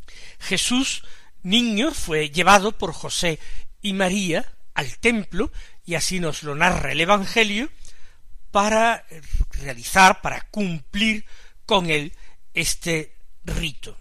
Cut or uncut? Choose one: uncut